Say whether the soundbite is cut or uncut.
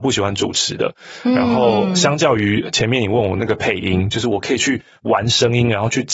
uncut